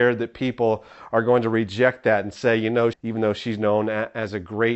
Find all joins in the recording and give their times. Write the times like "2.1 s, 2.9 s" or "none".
2.9 s